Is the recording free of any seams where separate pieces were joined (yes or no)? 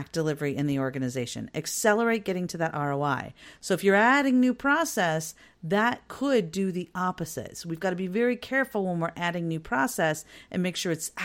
yes